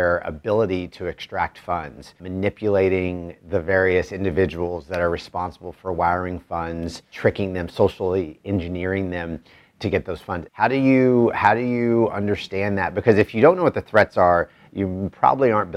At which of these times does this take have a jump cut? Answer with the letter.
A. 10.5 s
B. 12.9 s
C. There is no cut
A